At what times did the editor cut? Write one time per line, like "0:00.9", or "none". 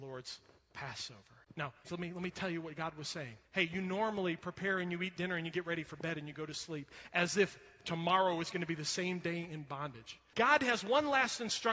0:01.8
0:03.4
0:10.3